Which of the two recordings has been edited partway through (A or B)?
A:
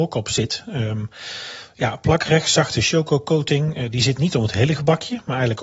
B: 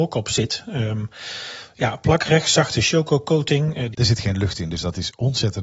B